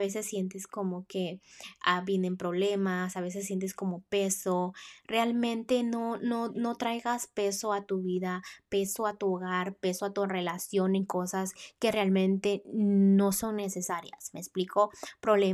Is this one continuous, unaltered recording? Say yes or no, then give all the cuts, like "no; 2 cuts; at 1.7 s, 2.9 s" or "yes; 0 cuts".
yes; 0 cuts